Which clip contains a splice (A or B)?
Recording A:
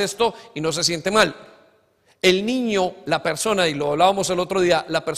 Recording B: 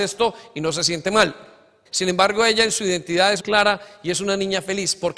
B